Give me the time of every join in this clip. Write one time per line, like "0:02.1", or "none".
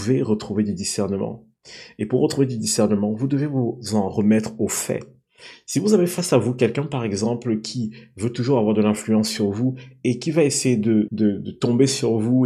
0:11.1